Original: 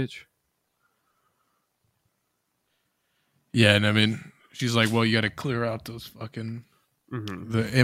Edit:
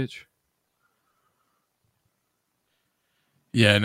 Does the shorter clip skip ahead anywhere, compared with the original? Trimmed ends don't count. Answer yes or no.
no